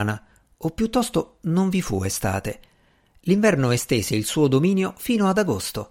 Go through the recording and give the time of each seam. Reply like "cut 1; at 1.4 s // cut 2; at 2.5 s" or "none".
none